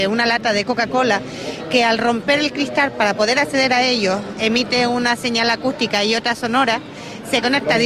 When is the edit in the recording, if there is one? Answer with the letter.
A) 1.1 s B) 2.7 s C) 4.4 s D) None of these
D